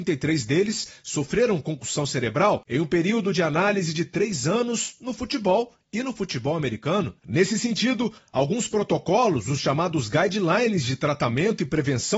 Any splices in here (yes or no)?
no